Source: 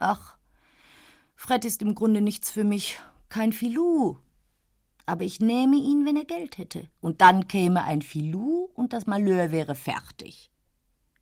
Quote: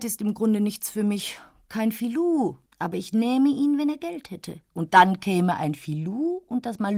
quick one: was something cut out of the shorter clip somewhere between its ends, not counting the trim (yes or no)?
yes